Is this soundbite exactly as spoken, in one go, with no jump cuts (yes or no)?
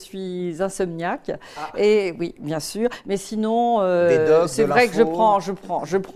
yes